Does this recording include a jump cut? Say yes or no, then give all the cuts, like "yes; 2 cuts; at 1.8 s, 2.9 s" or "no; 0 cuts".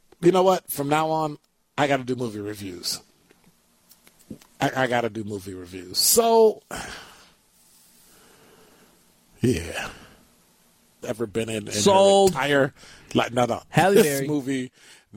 yes; 1 cut; at 11.0 s